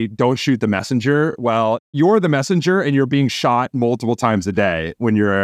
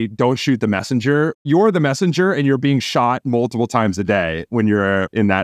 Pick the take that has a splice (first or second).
second